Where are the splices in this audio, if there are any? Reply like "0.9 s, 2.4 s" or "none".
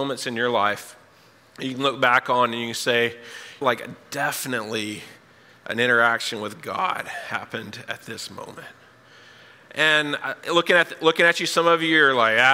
3.6 s